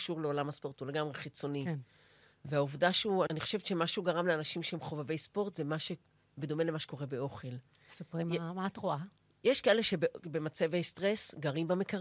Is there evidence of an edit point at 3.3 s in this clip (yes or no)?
yes